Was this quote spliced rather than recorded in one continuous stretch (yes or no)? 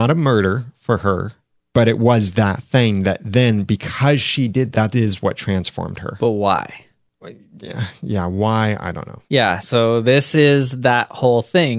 yes